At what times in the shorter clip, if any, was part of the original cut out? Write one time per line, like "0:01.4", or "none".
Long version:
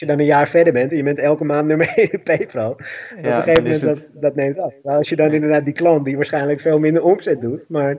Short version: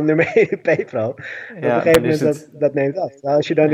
none

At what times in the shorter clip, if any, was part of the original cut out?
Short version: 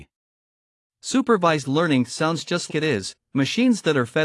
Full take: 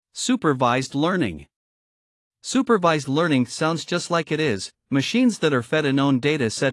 0:02.7

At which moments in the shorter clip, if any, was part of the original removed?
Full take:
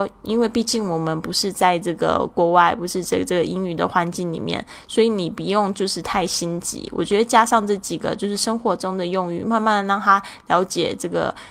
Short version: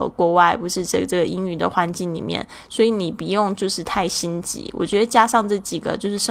none

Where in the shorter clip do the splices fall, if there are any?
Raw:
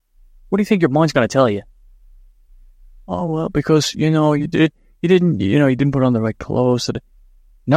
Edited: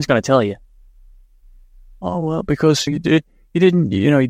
0:02.9

